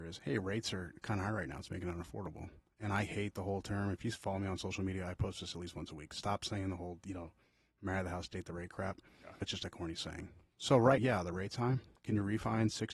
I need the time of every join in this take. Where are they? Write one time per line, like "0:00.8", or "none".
0:09.4
0:11.0